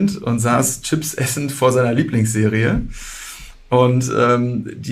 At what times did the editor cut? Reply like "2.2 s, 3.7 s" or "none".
none